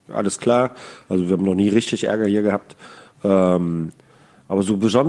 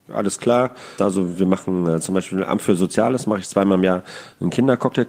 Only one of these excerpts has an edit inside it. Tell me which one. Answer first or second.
second